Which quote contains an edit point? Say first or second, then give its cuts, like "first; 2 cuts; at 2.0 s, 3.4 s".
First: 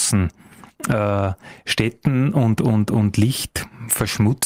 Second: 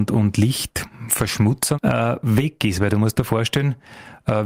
second; 1 cut; at 1.7 s